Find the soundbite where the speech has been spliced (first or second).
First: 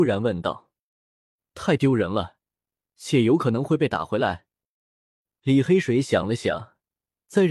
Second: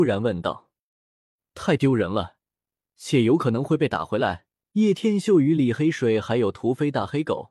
second